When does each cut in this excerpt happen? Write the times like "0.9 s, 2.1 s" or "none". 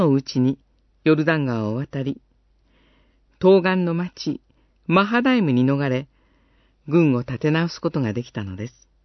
none